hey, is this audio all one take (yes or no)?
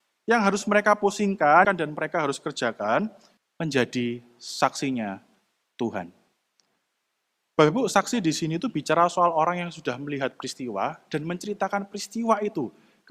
no